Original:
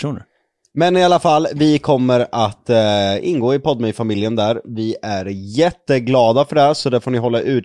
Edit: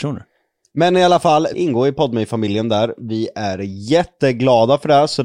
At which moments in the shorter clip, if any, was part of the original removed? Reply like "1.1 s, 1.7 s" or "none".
1.5 s